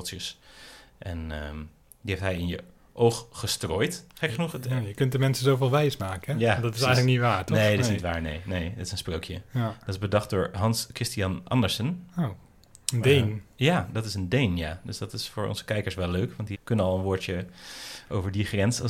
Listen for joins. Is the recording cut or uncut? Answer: cut